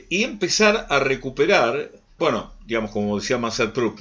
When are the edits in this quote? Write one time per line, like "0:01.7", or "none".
0:02.2